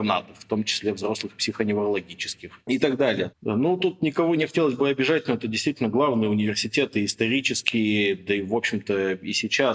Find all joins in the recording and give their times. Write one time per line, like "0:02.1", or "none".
0:03.3